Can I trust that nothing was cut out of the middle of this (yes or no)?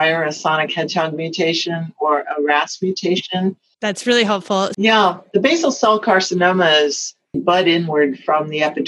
no